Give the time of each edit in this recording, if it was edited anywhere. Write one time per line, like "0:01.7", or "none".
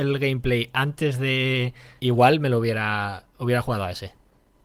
0:02.0